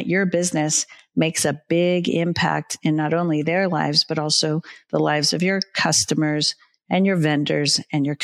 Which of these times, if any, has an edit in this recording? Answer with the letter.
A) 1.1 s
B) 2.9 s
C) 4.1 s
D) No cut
D